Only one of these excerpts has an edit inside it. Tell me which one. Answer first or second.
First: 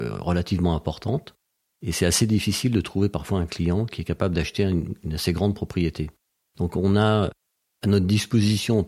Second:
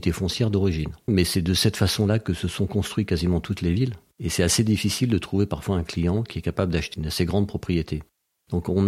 second